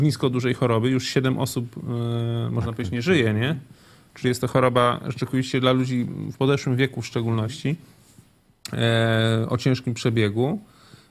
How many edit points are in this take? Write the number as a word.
zero